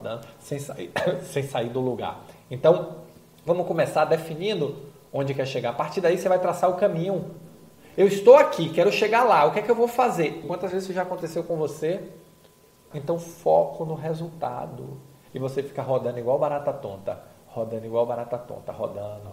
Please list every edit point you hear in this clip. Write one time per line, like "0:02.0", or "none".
0:10.4
0:12.9
0:15.3

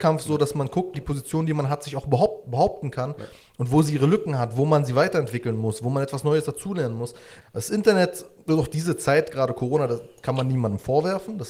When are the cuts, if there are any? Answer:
0:00.9
0:07.4

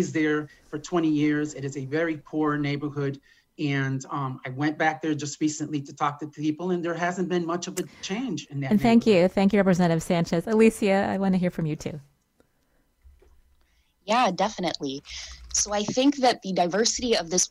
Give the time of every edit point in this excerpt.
none

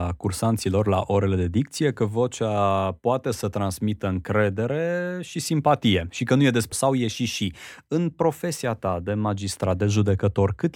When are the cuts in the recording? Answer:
0:06.7

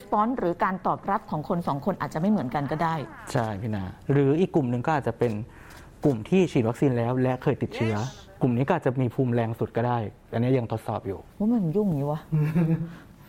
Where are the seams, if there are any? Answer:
0:11.3

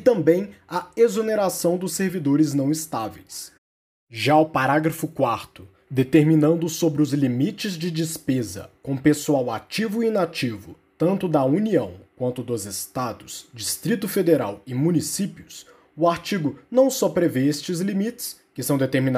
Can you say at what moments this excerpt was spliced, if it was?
0:05.9

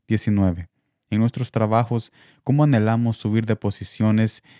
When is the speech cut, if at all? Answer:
0:01.1

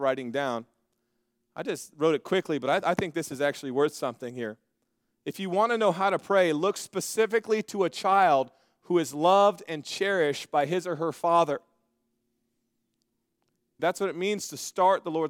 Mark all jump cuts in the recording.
0:13.8

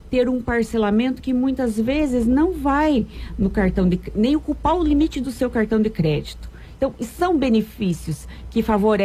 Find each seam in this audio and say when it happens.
0:06.8

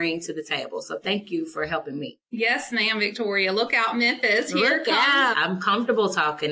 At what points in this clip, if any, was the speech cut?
0:05.3

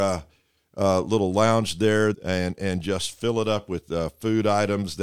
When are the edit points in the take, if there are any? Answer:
0:02.1

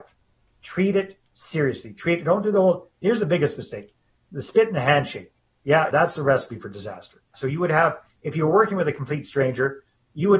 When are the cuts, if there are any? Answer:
0:01.3
0:05.9
0:07.3

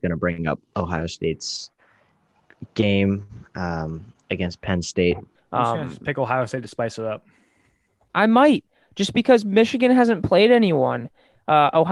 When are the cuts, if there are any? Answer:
0:05.3

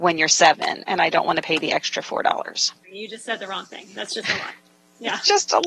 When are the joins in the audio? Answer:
0:02.8

